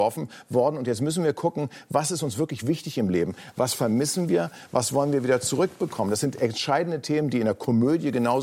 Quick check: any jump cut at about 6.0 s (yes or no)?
no